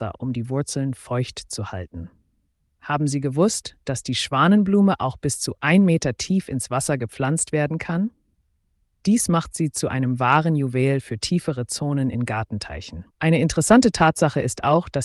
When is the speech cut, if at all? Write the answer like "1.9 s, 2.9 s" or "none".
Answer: 13.1 s

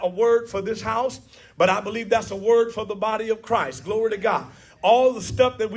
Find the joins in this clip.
none

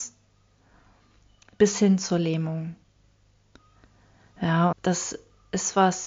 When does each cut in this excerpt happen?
4.7 s

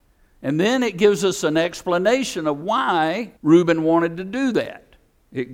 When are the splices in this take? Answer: 3.4 s

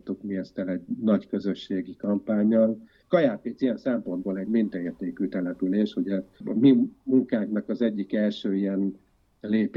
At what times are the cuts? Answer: 3.0 s

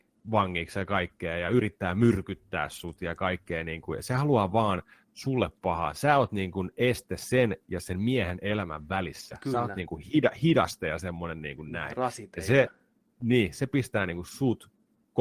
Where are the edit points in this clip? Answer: none

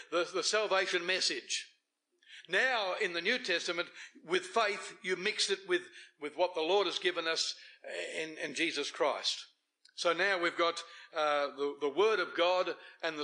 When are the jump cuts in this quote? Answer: none

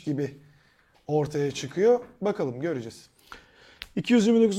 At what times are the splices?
none

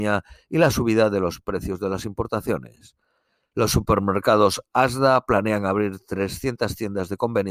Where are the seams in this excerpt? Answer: 3.5 s

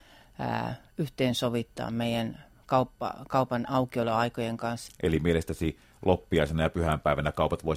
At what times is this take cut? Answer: 4.9 s

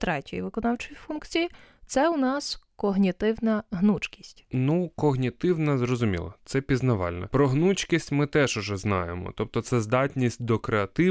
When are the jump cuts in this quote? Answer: none

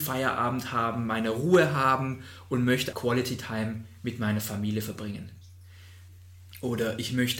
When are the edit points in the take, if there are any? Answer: 2.9 s

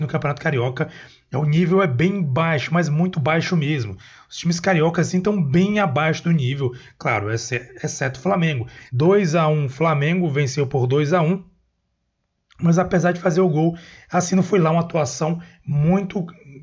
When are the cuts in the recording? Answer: 8.9 s

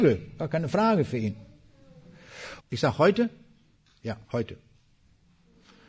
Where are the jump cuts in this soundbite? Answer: 2.6 s, 4.2 s

